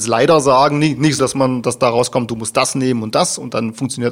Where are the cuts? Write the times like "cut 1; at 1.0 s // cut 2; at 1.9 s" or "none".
cut 1; at 1.2 s